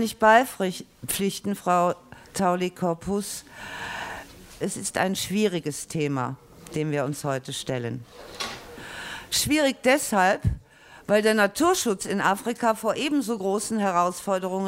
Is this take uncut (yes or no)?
no